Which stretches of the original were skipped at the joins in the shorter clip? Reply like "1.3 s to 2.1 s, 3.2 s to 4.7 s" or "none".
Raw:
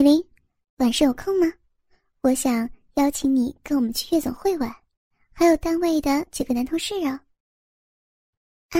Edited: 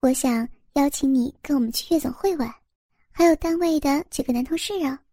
none